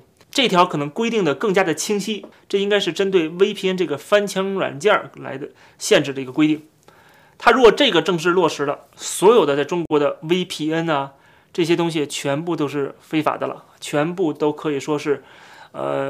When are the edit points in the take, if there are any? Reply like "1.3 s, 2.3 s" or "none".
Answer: none